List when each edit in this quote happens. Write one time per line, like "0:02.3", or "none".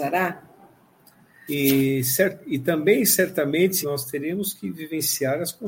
0:01.5
0:03.8